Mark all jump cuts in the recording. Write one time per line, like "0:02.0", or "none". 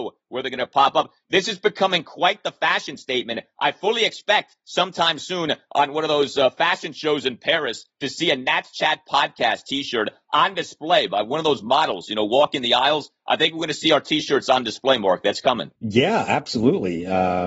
0:15.7

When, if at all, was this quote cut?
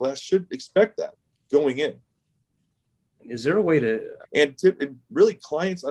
0:03.2
0:04.2

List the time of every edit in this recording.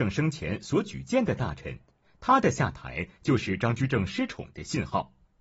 none

